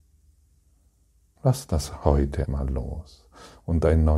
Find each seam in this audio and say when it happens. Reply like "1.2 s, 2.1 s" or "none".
1.4 s, 2.4 s